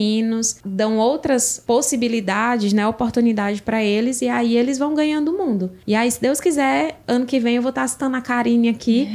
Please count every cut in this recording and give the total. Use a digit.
0